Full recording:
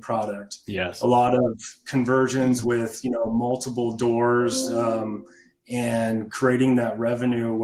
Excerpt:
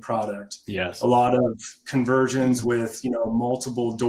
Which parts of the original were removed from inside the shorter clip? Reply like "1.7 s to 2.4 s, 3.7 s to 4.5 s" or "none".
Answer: none